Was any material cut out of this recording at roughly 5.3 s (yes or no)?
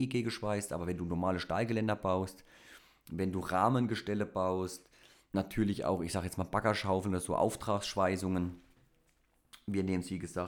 yes